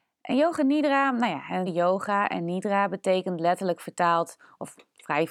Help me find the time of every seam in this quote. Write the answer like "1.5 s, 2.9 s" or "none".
1.7 s